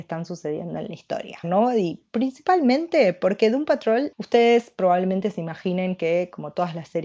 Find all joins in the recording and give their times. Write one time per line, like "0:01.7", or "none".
0:01.4
0:04.1

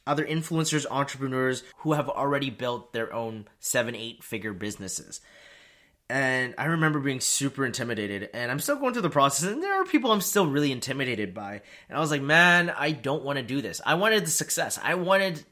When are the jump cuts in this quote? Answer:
none

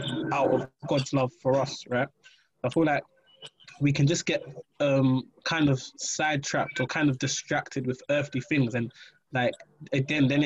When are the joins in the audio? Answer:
none

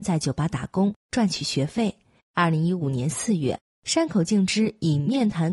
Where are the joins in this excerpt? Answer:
0:02.2

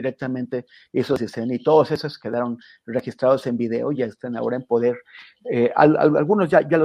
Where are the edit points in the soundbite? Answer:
none

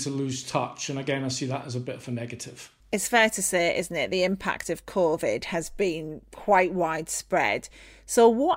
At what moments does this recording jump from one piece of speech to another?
0:02.8

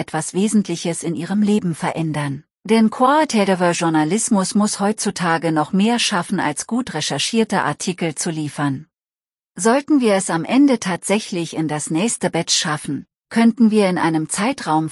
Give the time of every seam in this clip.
0:02.5
0:09.5

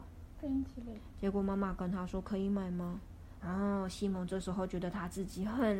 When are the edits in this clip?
0:03.4

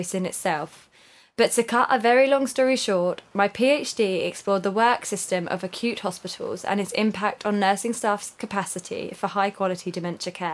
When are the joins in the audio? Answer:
none

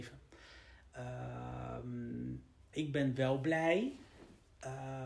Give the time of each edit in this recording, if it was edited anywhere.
0:02.7

